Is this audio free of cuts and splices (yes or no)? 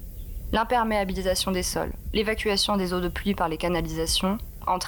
yes